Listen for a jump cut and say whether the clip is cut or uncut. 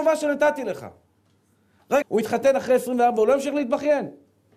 cut